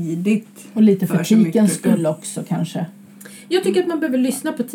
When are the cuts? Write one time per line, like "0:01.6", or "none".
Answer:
none